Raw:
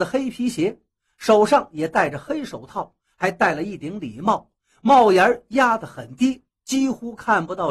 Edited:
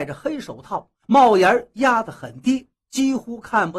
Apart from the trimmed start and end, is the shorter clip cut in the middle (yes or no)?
yes